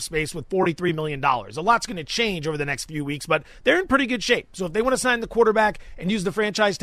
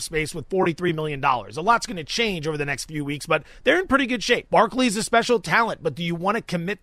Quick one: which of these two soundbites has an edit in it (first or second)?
second